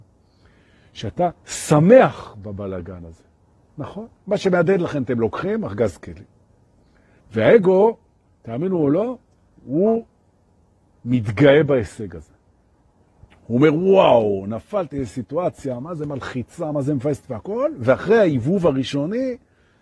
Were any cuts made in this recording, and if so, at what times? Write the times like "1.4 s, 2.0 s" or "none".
4.1 s, 7.2 s